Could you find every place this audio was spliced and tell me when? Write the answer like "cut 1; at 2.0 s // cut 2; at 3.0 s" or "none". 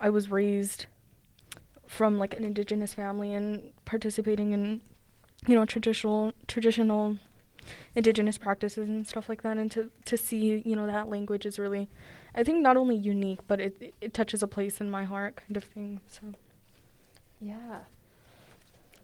none